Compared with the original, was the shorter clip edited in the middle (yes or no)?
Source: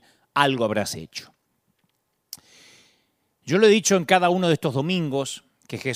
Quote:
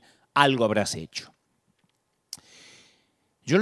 no